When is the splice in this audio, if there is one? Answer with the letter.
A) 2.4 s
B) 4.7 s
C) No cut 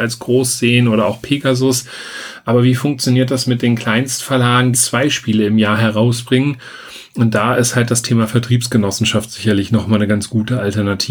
B